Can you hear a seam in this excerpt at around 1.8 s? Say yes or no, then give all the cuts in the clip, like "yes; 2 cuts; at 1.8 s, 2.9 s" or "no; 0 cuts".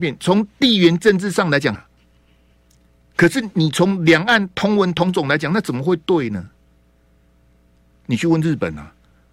yes; 2 cuts; at 1.8 s, 7.9 s